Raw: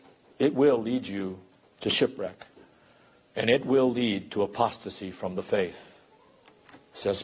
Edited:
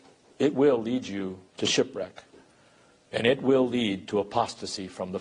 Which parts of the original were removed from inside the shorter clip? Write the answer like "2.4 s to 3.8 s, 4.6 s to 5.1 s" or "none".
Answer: 1.5 s to 1.7 s